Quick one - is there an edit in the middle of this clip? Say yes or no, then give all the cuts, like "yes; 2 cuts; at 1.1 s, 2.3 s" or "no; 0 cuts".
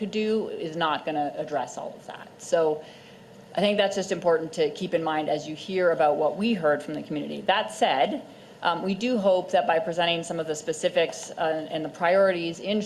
no; 0 cuts